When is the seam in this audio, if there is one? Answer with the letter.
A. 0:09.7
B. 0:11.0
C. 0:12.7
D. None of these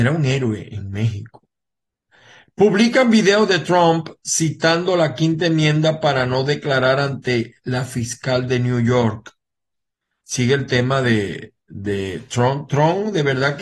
D